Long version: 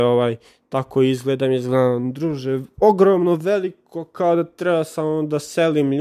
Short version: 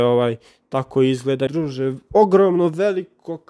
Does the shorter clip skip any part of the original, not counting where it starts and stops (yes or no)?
yes